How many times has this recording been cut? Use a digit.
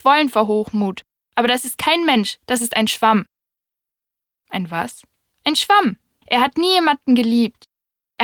1